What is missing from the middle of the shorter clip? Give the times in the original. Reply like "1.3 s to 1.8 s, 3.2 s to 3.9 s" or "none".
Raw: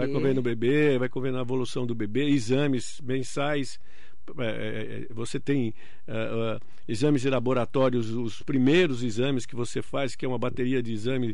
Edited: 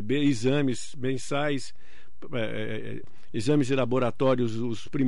5.1 s to 6.6 s